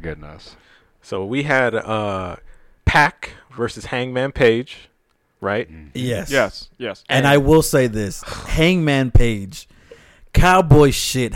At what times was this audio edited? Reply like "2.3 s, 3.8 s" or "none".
2.8 s